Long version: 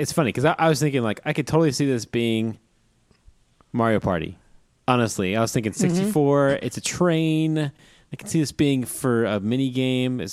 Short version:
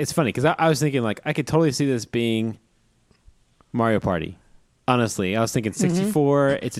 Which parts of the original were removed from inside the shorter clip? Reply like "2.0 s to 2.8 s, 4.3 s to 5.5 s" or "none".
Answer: none